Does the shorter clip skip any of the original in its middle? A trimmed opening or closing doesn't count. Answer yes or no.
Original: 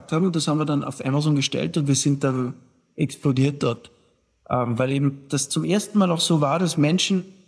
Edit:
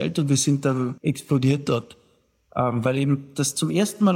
yes